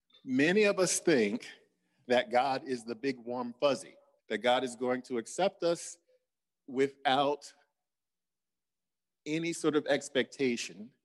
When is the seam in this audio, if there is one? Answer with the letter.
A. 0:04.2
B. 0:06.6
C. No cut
A